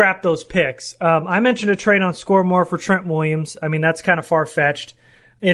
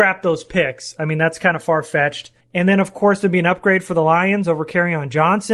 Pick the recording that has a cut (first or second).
second